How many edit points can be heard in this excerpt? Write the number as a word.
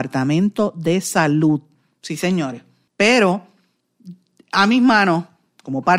one